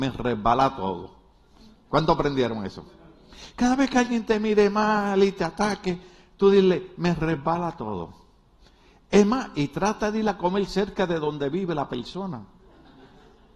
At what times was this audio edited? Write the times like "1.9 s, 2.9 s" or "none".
none